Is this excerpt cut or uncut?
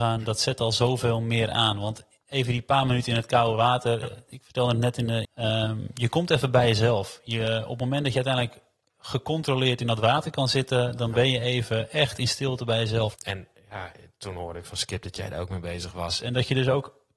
cut